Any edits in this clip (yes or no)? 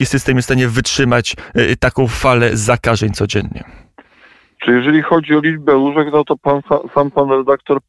no